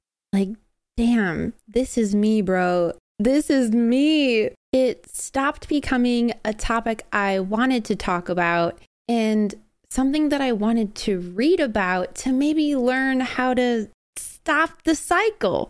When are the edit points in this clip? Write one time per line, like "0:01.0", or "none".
none

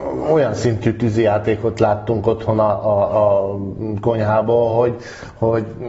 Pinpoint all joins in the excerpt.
none

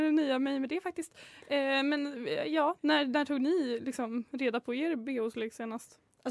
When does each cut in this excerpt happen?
none

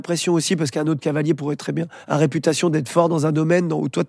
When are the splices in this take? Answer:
none

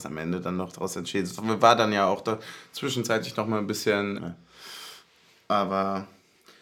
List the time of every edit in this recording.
0:04.2

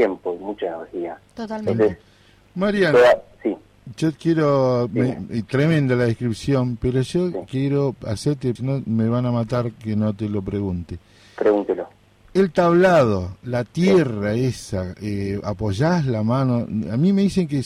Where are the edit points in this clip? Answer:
0:08.6

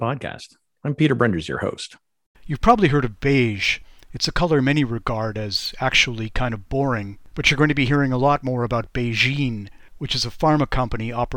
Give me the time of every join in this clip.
0:02.3

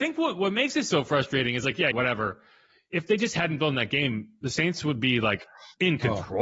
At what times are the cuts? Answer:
0:01.9

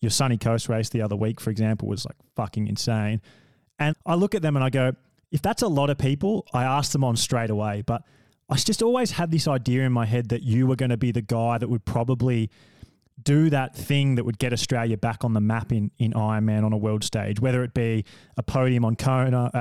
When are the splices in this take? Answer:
0:03.9

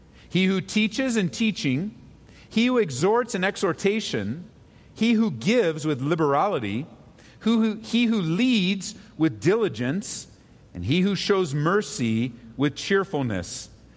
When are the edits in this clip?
none

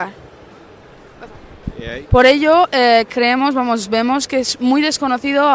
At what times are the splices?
0:02.0

